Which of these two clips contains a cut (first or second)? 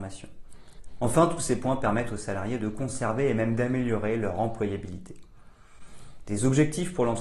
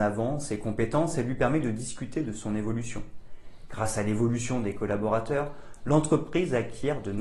second